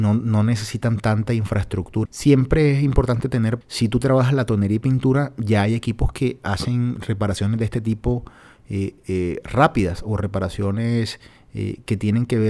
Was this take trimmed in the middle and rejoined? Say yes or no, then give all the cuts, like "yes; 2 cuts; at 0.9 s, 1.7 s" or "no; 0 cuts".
yes; 2 cuts; at 2.1 s, 3.6 s